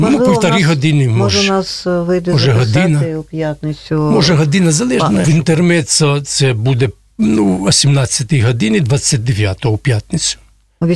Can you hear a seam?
yes; 1 cut; at 5.2 s

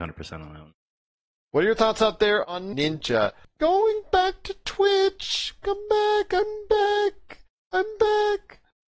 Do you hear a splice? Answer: no; 0 cuts

